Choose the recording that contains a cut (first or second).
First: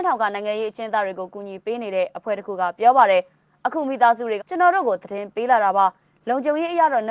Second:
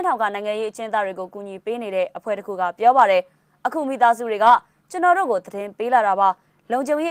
first